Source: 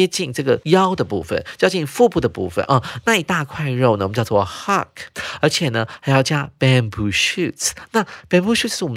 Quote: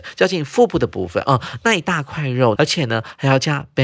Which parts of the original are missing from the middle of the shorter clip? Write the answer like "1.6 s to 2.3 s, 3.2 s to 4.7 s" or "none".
4.0 s to 5.4 s